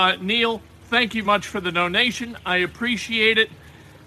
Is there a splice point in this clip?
yes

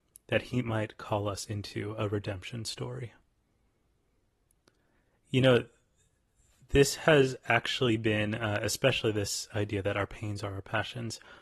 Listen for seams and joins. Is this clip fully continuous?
yes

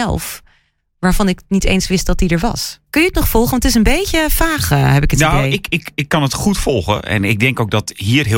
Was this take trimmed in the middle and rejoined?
no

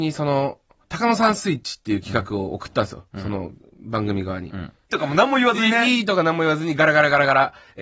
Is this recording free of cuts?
no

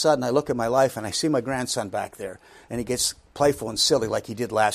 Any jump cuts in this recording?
no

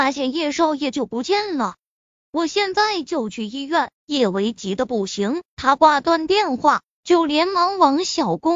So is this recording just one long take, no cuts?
no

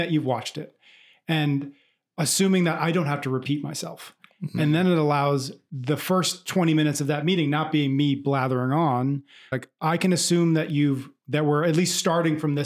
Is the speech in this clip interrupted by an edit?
yes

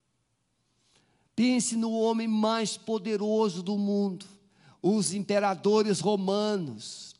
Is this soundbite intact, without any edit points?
yes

